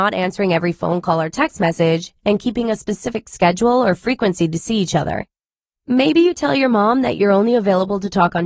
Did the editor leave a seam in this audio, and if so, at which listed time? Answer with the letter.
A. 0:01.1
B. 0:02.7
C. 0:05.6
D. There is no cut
D